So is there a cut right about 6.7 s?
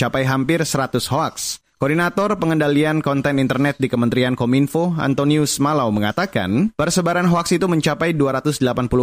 yes; 1 cut; at 6.7 s

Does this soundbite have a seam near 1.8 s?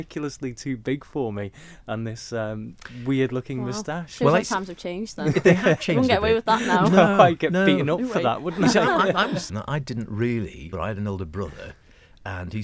no; 2 cuts; at 9.5 s, 10.7 s

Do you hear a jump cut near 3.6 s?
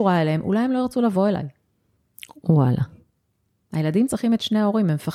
no; 1 cut; at 2.3 s

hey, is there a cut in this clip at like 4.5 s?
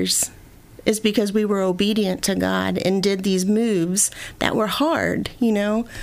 no; 0 cuts

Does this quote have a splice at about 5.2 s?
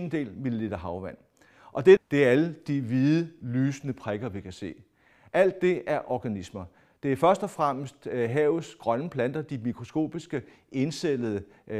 no; 1 cut; at 2.0 s

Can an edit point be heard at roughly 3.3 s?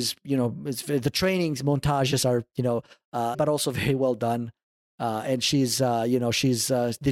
yes; 1 cut; at 3.3 s

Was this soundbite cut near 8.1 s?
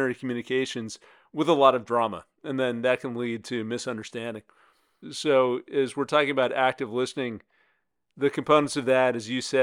no; 1 cut; at 5.0 s

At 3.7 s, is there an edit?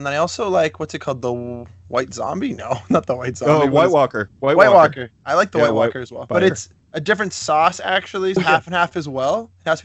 no; 2 cuts; at 6.3 s, 8.4 s

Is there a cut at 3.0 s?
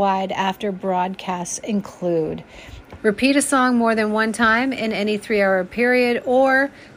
yes; 1 cut; at 3.0 s

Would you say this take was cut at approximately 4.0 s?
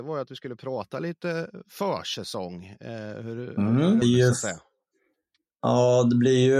yes; 1 cut; at 4.0 s

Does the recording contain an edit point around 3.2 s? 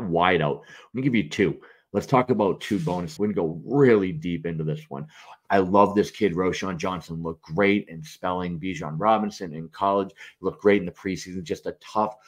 yes; 2 cuts; at 3.2 s, 5.4 s

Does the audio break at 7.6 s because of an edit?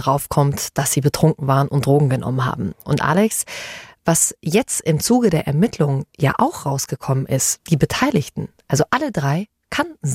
yes; 1 cut; at 7.6 s

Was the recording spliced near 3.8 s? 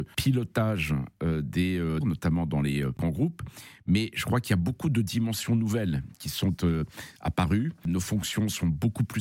no; 1 cut; at 2.0 s

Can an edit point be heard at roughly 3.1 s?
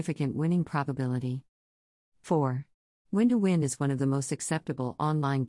yes; 1 cut; at 3.1 s

